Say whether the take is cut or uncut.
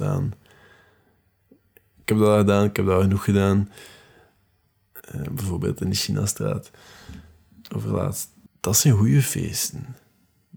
cut